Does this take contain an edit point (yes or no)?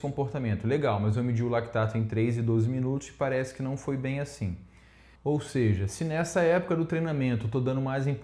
yes